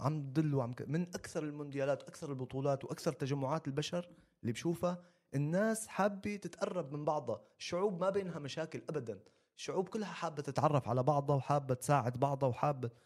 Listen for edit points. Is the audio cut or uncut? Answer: uncut